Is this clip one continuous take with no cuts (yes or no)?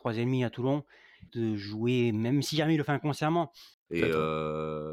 no